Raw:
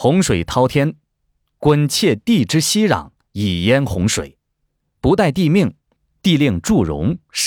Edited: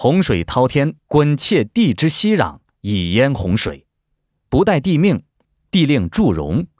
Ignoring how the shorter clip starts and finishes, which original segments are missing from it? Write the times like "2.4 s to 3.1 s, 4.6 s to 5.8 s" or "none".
1.0 s to 1.5 s